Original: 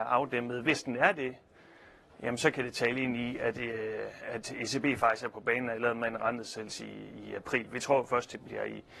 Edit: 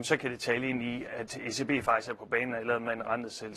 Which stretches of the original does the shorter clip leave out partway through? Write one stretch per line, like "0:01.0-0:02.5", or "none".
0:03.4-0:04.2